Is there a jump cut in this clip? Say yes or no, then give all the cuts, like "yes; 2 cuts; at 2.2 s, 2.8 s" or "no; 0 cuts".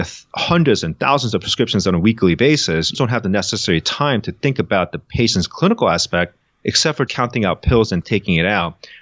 yes; 2 cuts; at 2.9 s, 7.1 s